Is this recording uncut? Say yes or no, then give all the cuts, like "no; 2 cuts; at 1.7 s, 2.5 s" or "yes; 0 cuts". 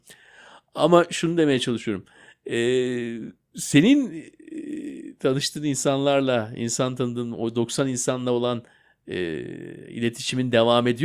yes; 0 cuts